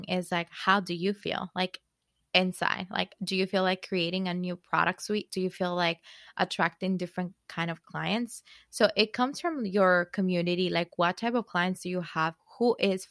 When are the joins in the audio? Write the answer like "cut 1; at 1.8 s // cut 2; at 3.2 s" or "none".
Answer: none